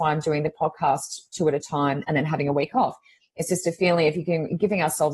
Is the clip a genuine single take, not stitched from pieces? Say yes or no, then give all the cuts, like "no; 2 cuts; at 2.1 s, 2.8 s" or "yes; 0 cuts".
yes; 0 cuts